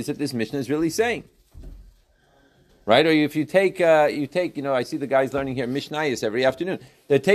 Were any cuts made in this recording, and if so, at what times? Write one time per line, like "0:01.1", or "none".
none